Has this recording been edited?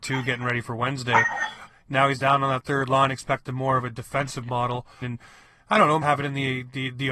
yes; 3 cuts; at 1.7 s, 5.0 s, 6.0 s

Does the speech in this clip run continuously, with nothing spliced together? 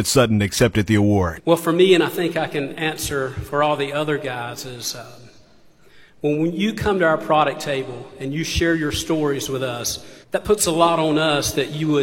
no; 2 cuts; at 1.4 s, 10.2 s

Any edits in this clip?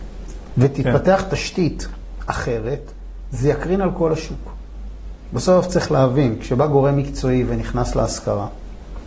no; 0 cuts

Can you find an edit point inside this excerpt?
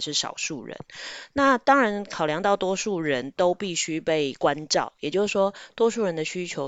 no; 0 cuts

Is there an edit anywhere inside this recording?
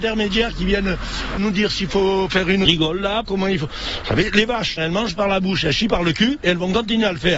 yes; 3 cuts; at 1.4 s, 3.2 s, 4.8 s

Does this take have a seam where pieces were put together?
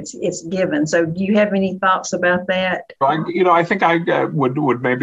yes; 1 cut; at 3.0 s

